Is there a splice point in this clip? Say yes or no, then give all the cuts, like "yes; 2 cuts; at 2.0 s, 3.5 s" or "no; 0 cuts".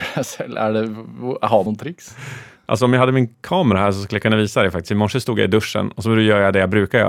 yes; 1 cut; at 1.7 s